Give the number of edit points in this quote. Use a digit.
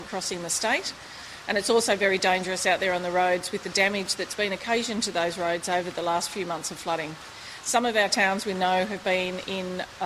0